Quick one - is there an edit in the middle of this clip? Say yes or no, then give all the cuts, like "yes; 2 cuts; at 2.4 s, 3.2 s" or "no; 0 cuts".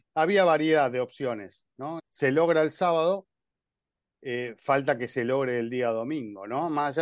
yes; 1 cut; at 2.0 s